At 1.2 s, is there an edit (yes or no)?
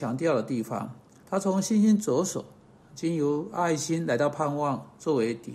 yes